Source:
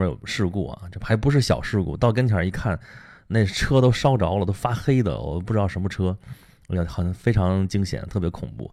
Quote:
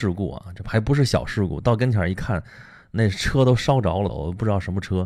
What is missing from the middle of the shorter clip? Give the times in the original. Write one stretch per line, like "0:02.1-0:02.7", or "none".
0:04.5-0:05.2